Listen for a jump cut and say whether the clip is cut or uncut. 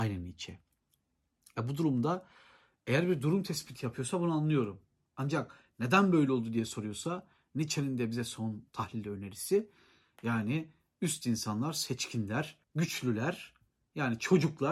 cut